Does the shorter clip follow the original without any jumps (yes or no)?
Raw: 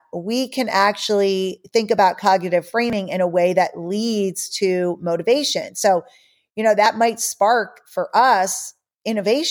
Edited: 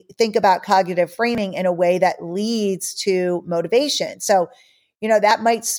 yes